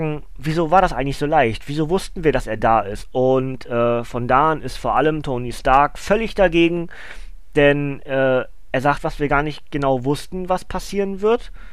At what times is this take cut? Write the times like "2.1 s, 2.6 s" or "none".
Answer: 3.0 s, 9.0 s